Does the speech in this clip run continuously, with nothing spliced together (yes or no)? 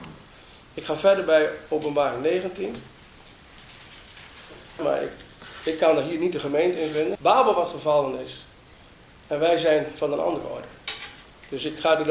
no